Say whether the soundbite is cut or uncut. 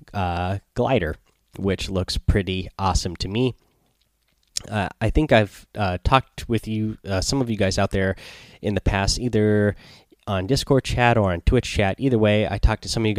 uncut